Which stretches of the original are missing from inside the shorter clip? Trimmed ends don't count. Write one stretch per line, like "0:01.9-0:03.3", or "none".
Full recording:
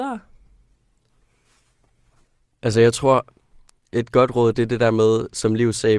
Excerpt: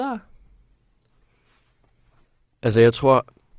none